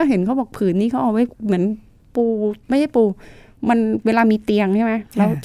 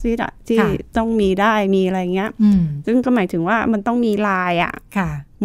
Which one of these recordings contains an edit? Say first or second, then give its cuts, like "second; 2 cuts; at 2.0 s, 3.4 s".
first; 2 cuts; at 1.3 s, 2.6 s